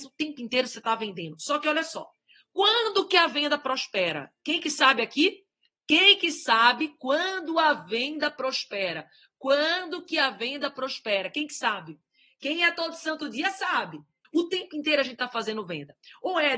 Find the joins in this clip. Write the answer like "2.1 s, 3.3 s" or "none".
14.2 s

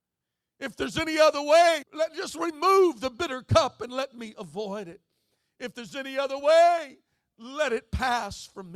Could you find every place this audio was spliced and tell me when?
1.8 s

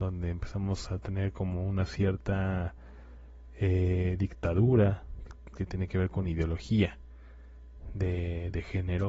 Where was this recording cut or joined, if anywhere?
none

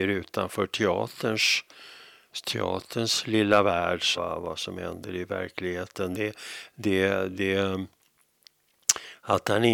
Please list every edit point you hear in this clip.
4.2 s

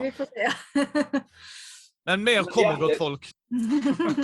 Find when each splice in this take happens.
3.3 s

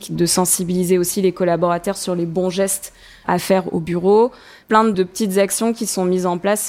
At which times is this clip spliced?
none

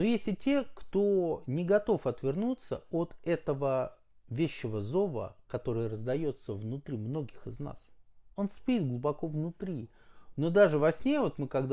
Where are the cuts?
8.4 s

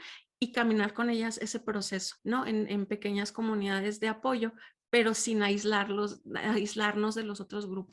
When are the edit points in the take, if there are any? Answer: 2.2 s

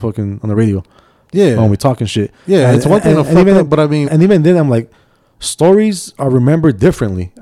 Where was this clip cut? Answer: 4.0 s

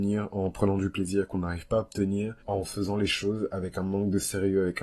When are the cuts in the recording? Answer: 2.4 s

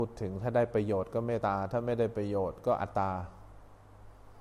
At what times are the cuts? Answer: 1.4 s, 2.9 s

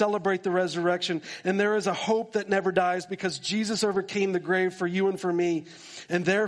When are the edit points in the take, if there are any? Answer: none

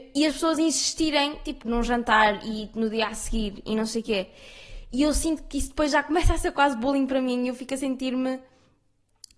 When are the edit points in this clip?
1.6 s

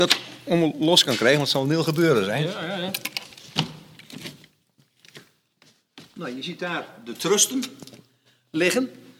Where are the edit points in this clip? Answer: none

